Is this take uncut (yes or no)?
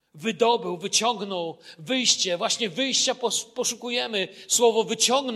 yes